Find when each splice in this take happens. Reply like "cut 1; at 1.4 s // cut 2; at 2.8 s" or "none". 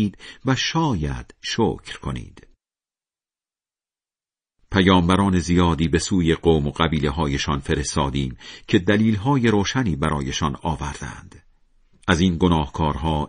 cut 1; at 12.0 s